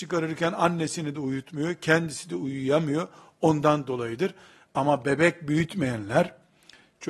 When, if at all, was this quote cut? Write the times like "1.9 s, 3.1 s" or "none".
none